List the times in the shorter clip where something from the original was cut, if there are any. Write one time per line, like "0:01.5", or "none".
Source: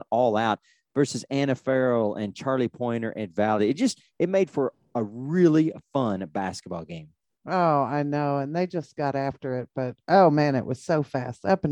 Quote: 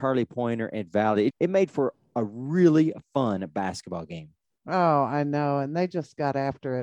0:01.3